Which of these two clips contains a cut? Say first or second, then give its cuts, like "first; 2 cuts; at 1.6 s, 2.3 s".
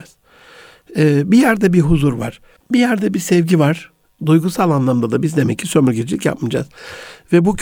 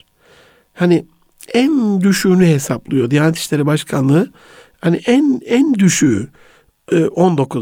first; 2 cuts; at 2.6 s, 4.2 s